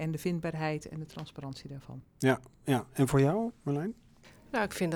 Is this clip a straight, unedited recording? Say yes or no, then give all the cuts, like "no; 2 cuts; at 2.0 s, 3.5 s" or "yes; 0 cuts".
yes; 0 cuts